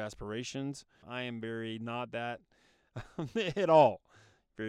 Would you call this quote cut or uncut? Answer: cut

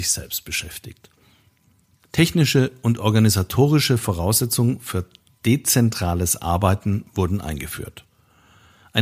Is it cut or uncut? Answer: uncut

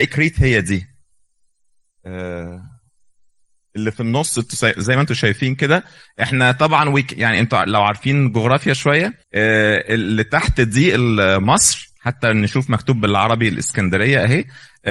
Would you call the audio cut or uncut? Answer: cut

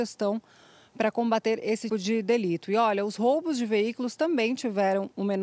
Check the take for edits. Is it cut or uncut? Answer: cut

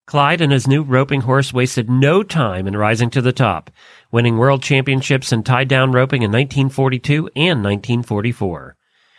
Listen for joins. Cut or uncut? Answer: uncut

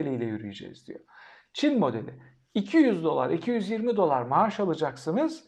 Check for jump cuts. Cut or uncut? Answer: uncut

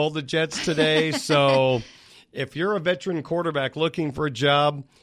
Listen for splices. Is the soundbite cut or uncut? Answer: uncut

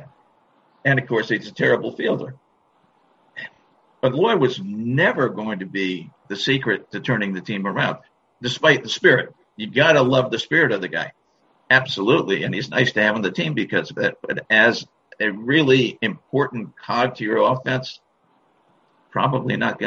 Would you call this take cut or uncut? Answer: uncut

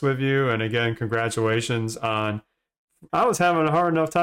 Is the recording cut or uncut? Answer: cut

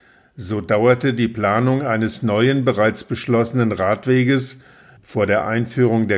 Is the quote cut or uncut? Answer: uncut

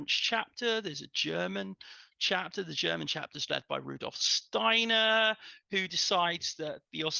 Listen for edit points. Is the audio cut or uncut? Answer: uncut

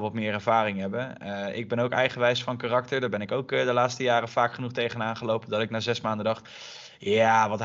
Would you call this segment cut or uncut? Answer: uncut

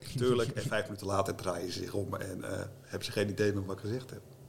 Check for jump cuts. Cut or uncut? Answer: uncut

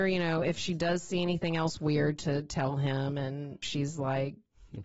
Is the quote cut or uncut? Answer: cut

